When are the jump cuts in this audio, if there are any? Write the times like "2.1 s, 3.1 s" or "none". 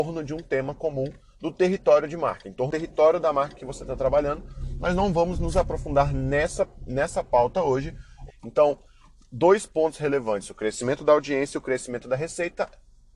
8.3 s